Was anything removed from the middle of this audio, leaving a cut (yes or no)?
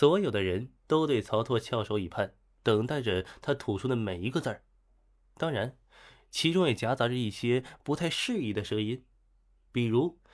no